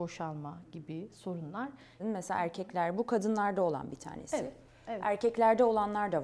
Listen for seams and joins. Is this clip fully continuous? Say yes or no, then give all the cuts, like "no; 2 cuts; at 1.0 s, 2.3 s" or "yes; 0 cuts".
no; 1 cut; at 2.0 s